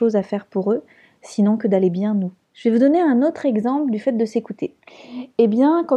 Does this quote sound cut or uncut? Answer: cut